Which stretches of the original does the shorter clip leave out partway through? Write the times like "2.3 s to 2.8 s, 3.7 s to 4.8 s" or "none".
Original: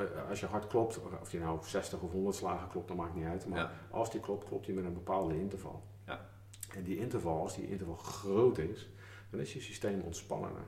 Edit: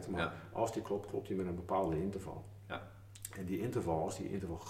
none